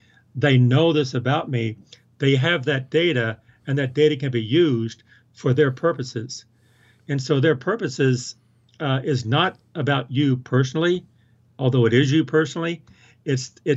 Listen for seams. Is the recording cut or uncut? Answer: uncut